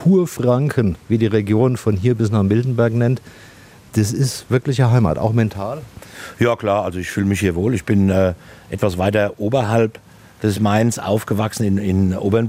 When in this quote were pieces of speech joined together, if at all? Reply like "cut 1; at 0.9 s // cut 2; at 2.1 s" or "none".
none

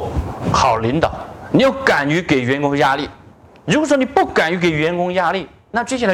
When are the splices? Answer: none

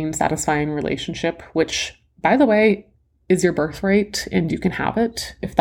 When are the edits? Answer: none

